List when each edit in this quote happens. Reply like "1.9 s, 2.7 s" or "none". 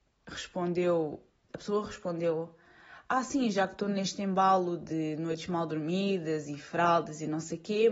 1.5 s